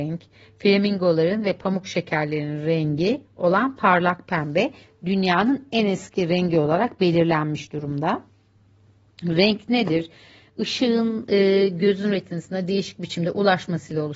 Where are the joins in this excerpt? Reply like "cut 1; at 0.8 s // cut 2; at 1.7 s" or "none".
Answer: none